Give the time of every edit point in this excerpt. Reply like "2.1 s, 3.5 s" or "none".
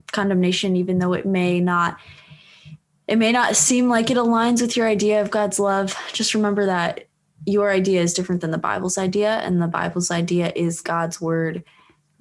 10.8 s

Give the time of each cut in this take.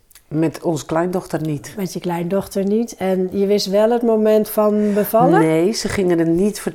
none

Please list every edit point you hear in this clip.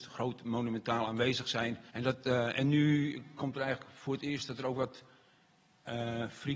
1.9 s

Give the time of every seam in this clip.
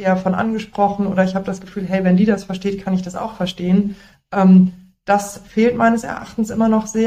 none

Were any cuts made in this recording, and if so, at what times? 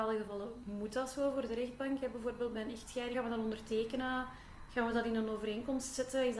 3.1 s

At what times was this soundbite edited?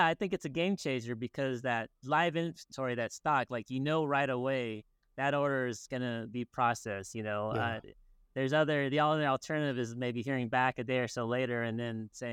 none

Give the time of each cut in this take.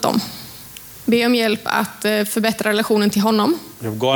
1.0 s

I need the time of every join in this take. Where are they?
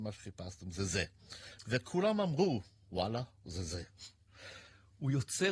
none

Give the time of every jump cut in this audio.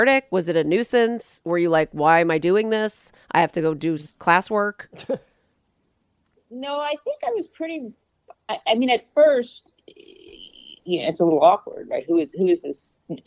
6.4 s

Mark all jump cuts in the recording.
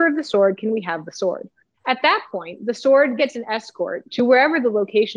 1.7 s, 3.2 s

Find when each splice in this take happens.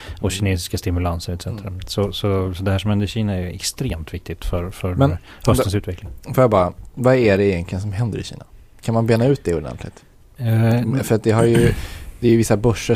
none

